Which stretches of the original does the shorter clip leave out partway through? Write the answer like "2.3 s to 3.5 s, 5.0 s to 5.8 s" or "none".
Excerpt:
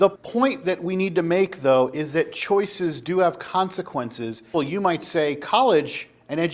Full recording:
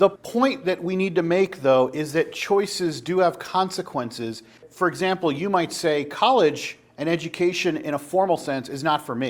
4.5 s to 5.2 s

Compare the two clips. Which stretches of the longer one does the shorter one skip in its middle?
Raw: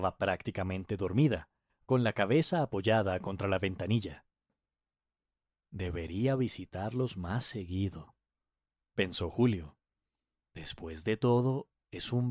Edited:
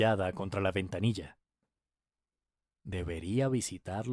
none

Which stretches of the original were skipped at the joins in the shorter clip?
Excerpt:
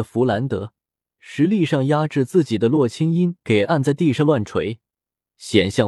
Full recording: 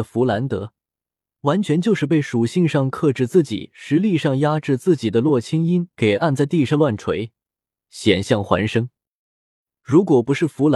1.2 s to 3.7 s

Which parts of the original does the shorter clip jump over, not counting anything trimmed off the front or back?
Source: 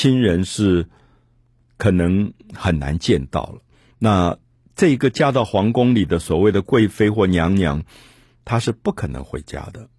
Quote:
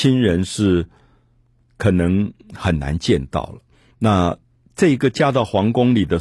none

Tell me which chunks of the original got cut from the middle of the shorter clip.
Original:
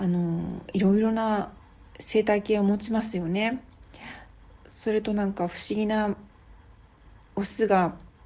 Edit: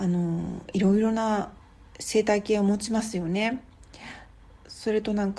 none

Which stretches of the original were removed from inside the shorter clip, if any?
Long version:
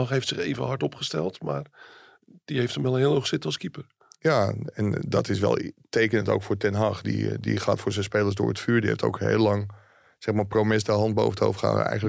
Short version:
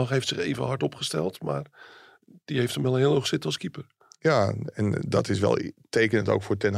none

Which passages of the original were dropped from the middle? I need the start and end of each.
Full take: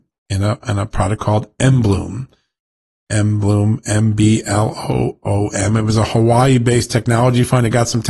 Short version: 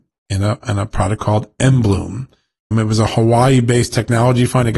2.7 s to 5.7 s

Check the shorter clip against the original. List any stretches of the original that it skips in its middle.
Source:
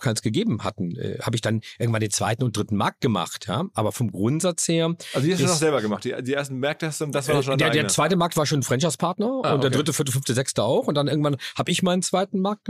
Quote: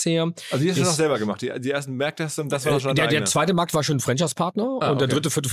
none

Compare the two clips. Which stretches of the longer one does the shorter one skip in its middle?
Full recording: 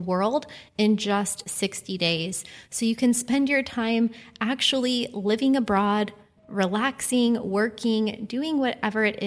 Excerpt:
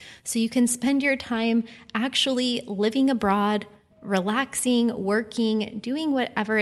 none

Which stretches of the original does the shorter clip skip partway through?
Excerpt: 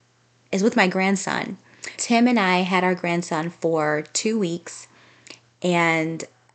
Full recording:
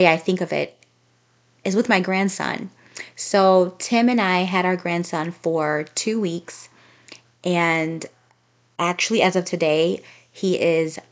3.1 s to 3.8 s

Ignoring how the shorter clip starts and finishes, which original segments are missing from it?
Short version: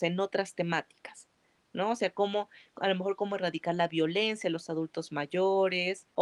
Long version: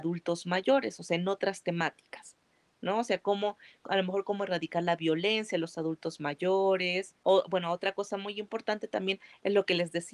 none

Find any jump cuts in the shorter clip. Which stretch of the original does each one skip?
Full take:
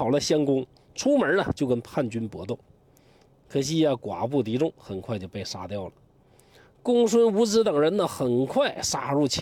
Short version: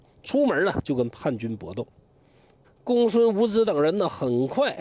3.4 s to 6.6 s

